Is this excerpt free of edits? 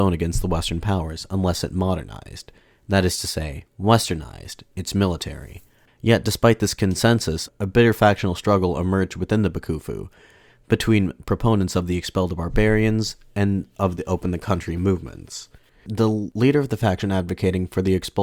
no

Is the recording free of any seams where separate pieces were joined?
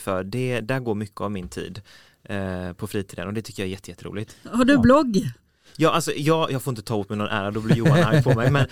no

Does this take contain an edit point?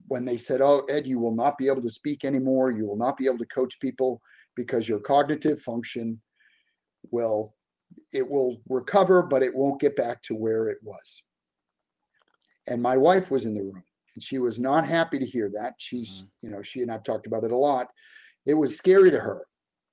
yes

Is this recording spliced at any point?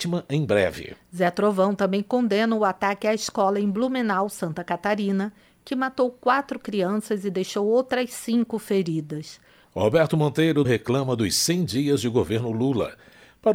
yes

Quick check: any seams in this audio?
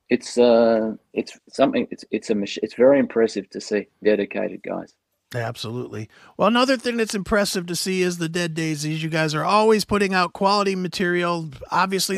yes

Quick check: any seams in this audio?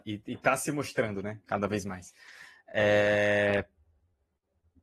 no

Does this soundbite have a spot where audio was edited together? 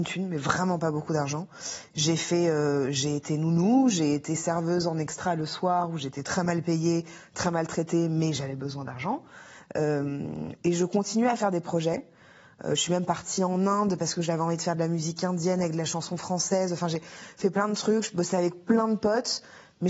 no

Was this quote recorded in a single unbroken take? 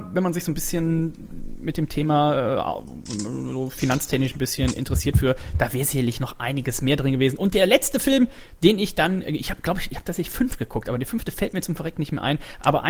yes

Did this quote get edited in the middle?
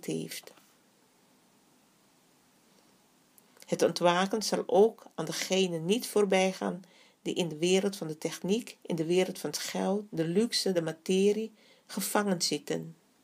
no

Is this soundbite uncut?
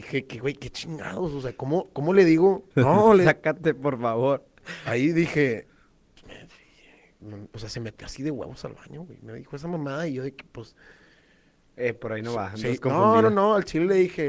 no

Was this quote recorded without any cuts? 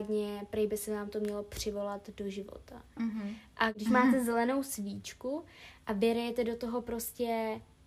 no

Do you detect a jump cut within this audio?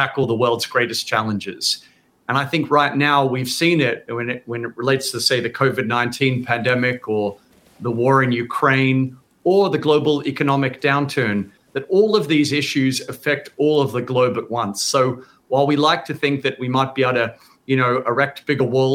no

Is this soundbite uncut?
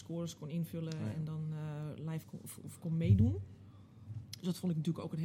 yes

